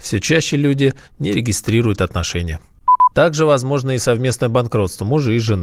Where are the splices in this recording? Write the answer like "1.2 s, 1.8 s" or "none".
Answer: 3.1 s